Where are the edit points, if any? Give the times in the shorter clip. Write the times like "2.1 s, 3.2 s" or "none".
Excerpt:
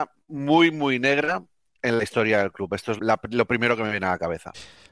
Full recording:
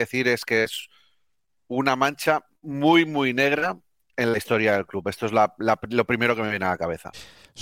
3.0 s

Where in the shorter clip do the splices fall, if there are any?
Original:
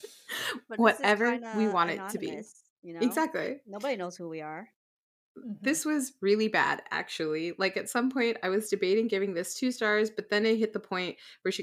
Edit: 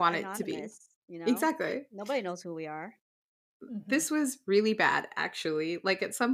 none

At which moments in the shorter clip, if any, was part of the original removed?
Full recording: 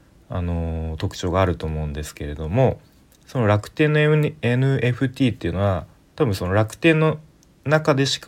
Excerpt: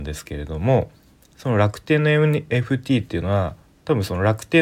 2.5 s

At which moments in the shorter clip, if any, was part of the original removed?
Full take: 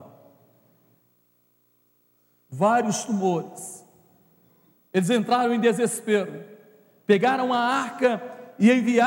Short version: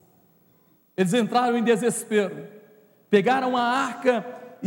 none

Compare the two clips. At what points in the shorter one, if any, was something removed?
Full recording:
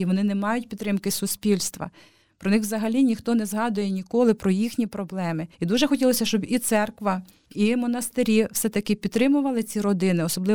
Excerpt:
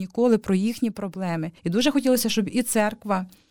none

